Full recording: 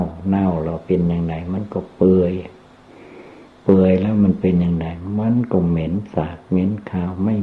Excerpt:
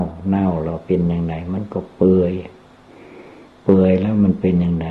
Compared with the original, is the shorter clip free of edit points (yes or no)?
yes